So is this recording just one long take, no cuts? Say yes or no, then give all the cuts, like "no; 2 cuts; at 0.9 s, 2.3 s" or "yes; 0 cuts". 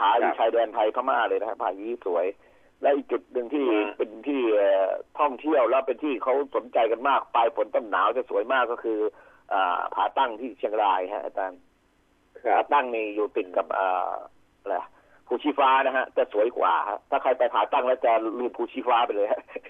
yes; 0 cuts